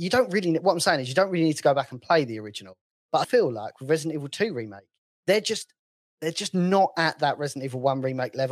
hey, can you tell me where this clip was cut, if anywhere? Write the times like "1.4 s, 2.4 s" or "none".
3.2 s, 5.1 s